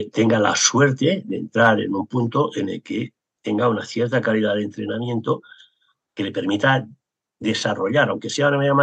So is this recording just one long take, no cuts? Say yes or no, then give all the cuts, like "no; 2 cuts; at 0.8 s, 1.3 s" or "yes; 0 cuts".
yes; 0 cuts